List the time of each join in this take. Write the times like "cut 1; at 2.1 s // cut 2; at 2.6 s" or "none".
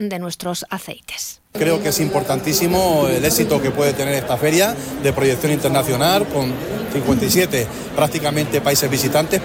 cut 1; at 1.5 s